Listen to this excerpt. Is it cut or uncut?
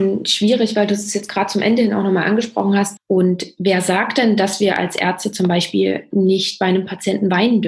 cut